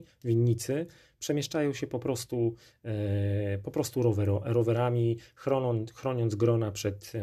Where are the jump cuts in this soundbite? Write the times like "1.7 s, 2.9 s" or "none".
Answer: none